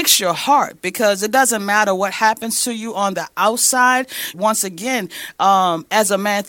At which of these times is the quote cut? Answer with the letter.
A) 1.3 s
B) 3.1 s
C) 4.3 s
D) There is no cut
C